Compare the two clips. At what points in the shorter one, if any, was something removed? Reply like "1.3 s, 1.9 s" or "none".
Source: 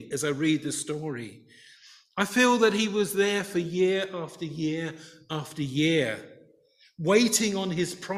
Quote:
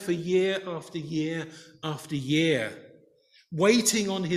none